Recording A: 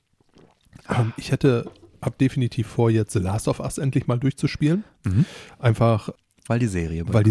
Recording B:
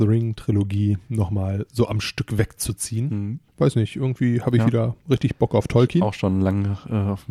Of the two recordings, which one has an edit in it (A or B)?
B